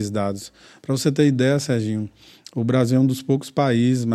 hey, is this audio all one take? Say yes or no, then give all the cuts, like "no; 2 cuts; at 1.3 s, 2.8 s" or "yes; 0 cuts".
yes; 0 cuts